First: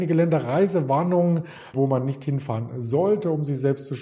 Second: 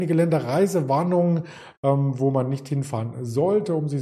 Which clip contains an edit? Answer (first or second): first